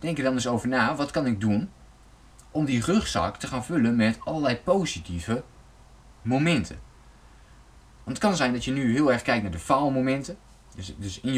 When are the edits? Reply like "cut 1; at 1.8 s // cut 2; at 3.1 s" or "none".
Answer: none